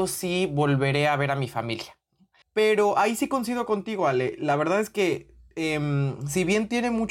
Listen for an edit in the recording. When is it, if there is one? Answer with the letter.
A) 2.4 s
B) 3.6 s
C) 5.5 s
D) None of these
A